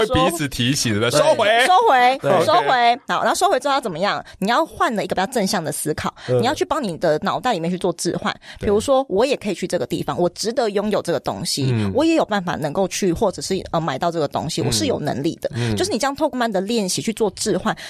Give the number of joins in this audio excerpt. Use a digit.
1